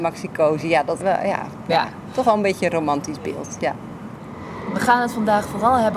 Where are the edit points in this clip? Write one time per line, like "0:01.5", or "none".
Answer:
0:01.0